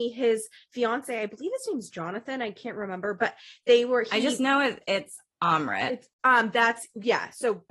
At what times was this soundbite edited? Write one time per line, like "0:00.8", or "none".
0:06.1